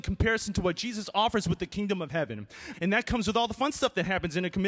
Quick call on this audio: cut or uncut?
cut